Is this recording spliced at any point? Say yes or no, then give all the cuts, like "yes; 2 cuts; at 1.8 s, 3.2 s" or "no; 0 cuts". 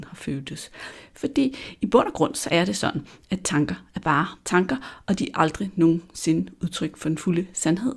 no; 0 cuts